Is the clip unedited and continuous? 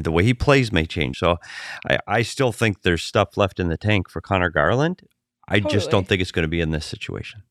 no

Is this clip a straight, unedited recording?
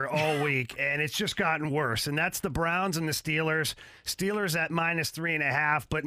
yes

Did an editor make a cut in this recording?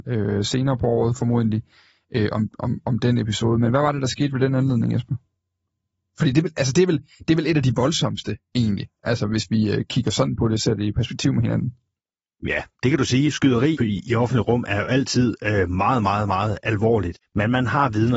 yes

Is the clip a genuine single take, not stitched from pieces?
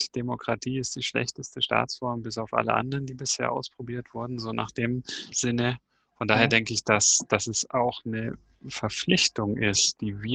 no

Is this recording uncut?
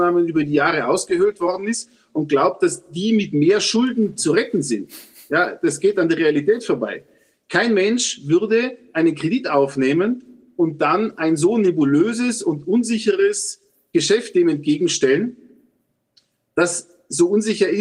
yes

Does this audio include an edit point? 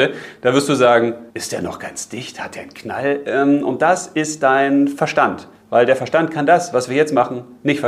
yes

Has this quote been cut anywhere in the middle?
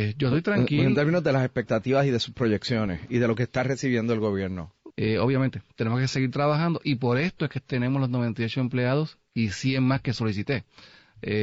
yes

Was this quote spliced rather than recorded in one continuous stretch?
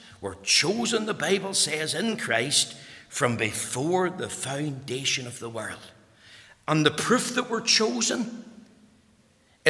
no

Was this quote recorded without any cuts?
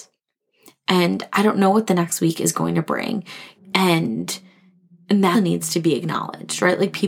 no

